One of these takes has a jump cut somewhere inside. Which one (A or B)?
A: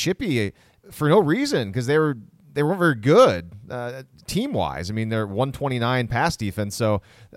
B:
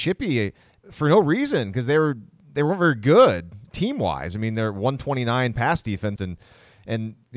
B